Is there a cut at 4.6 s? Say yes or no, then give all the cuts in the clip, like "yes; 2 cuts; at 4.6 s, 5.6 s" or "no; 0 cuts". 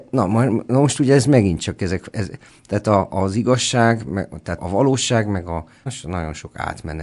yes; 2 cuts; at 4.6 s, 5.9 s